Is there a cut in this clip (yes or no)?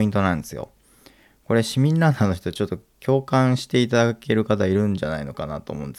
no